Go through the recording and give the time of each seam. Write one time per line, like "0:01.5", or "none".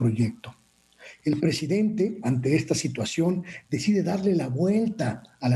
0:01.2